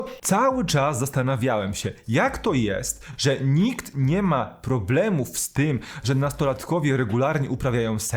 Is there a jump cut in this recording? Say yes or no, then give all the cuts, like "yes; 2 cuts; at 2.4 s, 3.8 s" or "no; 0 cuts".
no; 0 cuts